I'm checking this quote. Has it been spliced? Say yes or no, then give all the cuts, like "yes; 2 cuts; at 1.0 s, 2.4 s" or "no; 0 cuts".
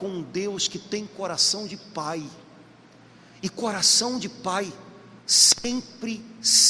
no; 0 cuts